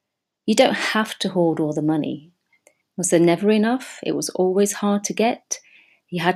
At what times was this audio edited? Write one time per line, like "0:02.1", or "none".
0:02.8